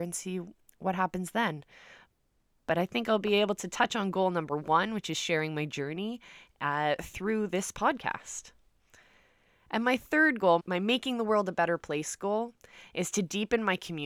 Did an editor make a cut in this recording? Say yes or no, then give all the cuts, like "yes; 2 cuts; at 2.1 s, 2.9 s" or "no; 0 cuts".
yes; 1 cut; at 10.6 s